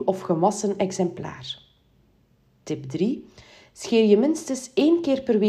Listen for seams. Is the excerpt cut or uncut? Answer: uncut